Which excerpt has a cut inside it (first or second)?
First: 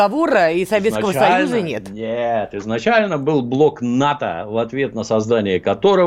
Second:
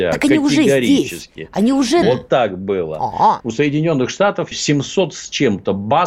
second